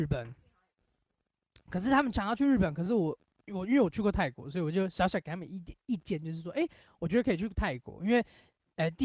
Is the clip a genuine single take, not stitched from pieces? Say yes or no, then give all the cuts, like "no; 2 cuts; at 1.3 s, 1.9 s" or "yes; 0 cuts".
yes; 0 cuts